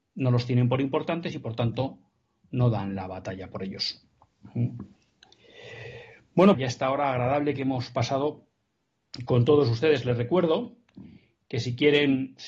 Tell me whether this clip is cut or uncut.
cut